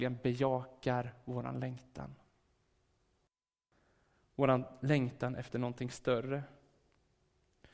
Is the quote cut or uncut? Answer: uncut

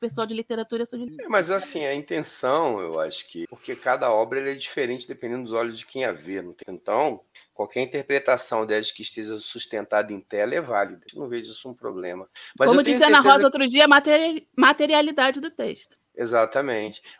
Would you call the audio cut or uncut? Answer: uncut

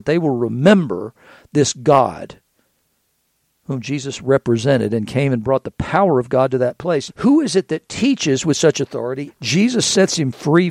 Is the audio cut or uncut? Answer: cut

